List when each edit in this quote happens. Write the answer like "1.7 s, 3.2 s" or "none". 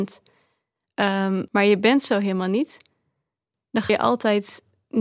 1.5 s, 3.9 s